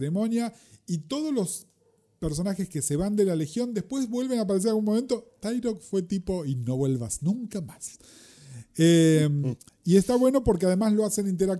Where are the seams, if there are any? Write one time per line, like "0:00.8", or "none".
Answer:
none